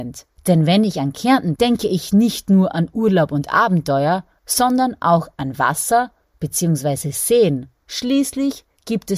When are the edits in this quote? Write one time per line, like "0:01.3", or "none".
0:01.6